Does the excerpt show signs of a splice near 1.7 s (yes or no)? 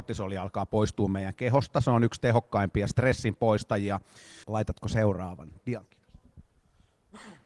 no